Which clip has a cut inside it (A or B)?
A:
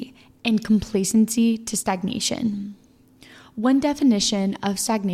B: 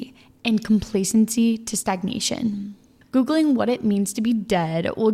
B